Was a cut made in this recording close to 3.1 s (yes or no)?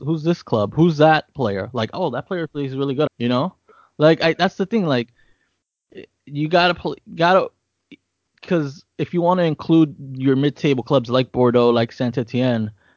yes